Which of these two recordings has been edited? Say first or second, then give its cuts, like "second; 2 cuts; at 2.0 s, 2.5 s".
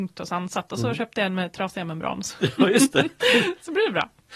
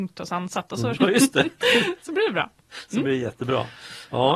second; 1 cut; at 1.0 s